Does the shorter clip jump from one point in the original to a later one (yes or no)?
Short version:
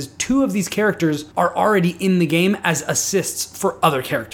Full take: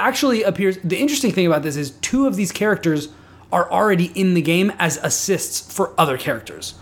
yes